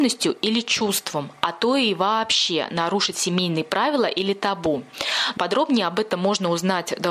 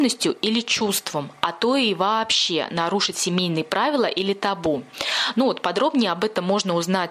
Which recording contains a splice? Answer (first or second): first